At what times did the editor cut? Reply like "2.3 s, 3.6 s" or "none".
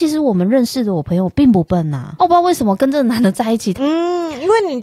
2.2 s, 3.7 s